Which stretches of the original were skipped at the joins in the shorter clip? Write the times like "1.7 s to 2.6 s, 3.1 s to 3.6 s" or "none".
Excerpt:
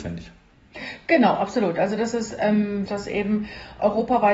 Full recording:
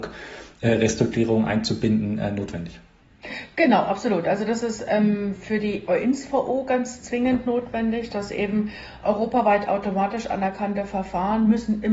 5.3 s to 8.1 s